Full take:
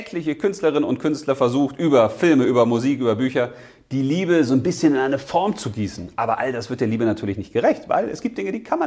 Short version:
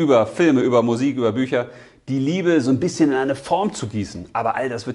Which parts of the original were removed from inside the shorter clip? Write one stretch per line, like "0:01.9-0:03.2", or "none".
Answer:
none